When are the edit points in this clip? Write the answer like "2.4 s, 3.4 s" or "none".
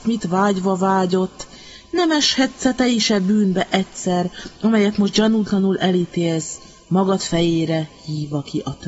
none

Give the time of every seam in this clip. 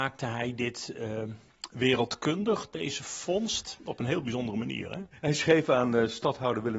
none

